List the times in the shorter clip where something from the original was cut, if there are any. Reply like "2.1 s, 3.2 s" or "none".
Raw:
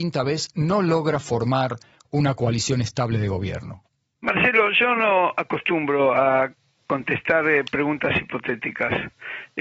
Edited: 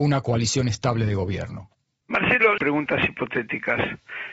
2.6 s